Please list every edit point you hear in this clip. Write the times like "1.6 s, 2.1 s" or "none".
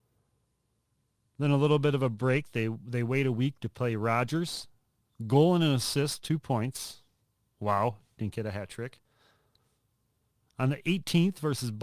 none